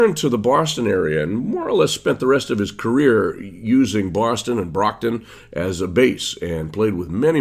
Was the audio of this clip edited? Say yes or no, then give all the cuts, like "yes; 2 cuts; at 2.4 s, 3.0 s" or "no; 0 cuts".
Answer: no; 0 cuts